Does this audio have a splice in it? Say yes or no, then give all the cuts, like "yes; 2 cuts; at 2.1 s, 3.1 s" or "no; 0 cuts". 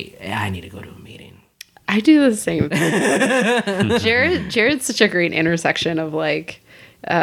no; 0 cuts